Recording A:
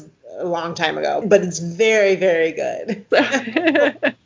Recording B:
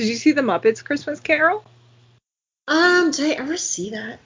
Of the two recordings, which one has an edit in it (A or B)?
A